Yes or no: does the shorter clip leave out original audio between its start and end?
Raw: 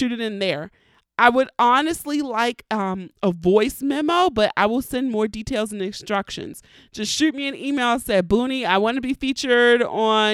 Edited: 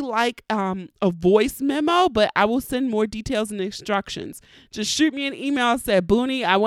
no